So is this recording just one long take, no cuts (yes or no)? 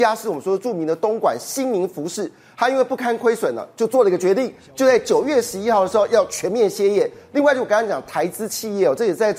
yes